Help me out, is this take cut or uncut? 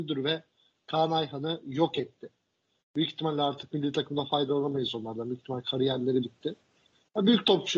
uncut